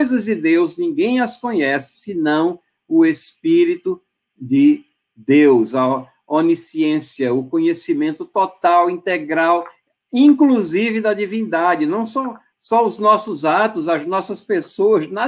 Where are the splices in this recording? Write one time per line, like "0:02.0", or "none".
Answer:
none